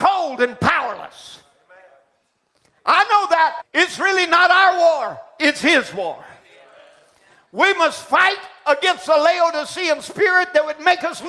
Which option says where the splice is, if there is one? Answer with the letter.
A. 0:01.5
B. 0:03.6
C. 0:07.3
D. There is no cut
B